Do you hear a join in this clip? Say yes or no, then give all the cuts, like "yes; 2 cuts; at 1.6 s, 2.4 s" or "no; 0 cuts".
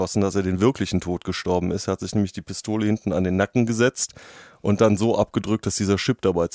no; 0 cuts